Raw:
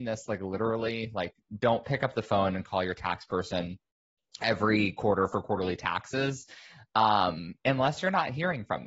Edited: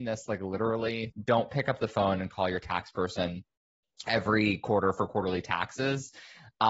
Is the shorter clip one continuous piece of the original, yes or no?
no